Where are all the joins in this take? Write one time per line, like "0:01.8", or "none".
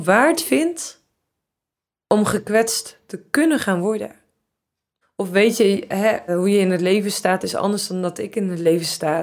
0:05.0
0:06.3